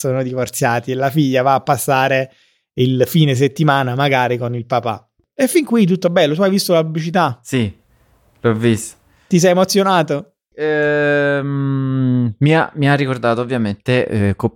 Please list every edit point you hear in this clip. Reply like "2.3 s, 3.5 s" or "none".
10.5 s